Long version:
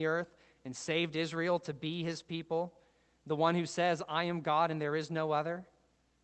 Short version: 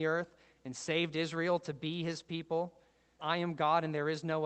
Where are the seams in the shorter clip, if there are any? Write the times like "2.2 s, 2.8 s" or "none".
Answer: 3.2 s